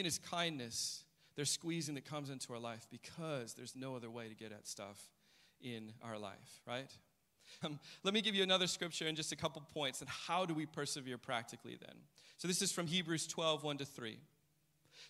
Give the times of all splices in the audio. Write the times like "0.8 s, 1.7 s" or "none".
7.6 s